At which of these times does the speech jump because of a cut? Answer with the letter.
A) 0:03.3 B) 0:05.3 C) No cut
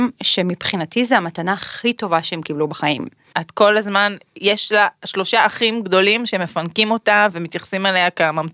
A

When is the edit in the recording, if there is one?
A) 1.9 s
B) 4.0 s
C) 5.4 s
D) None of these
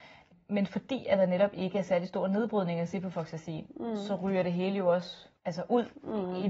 C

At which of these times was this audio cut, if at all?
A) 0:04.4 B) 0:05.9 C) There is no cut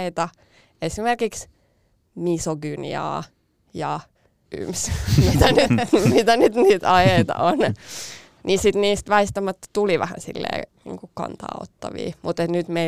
A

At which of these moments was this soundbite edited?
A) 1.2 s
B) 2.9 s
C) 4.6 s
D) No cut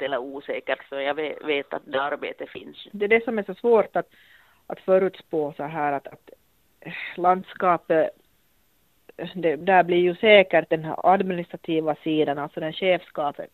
B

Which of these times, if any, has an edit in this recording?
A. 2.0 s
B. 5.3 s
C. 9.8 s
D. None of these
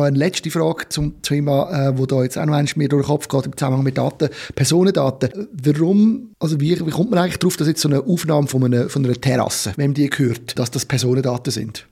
C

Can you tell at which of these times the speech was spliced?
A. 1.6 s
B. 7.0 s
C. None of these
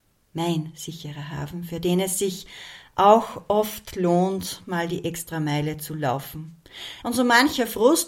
B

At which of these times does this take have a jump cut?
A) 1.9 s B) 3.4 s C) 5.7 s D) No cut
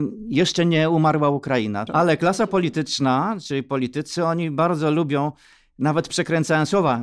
A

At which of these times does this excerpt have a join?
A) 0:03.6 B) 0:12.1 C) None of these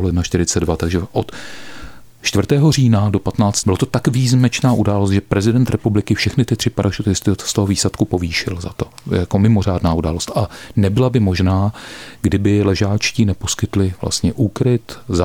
A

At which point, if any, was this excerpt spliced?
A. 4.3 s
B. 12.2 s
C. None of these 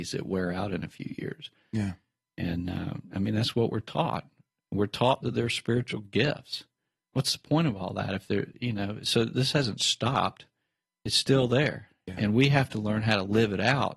C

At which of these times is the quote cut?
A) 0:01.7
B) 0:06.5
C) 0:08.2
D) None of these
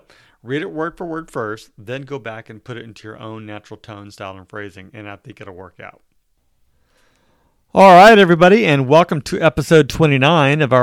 D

